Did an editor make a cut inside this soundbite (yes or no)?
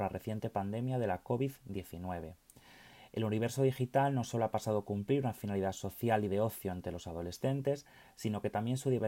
no